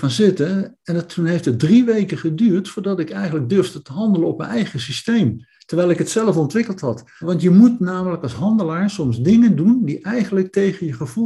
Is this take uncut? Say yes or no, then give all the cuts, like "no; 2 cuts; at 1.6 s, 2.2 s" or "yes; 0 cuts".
no; 1 cut; at 7.2 s